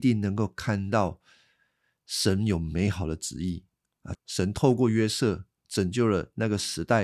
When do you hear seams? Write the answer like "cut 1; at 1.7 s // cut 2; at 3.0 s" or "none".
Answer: cut 1; at 4.1 s